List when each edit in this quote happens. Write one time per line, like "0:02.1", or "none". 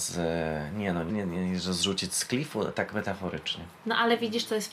0:01.1